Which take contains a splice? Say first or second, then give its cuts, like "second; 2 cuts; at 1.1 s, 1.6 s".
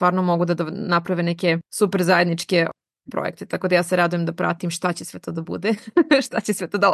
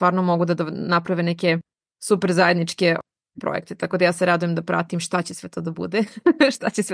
first; 1 cut; at 1.6 s